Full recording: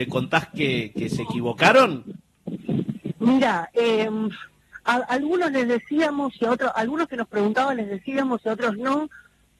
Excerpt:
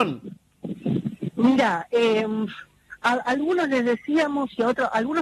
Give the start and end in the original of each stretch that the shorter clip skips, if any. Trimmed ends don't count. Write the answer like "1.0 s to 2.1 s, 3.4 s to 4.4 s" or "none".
none